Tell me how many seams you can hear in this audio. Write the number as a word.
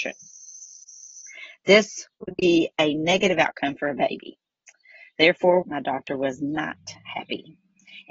one